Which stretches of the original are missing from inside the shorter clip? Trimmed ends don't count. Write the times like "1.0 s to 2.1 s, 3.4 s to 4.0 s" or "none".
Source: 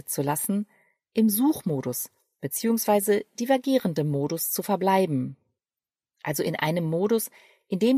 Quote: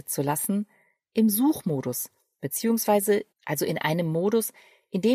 3.3 s to 6.1 s